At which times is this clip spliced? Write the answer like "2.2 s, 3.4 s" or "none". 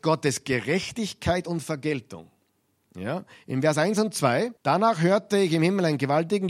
4.6 s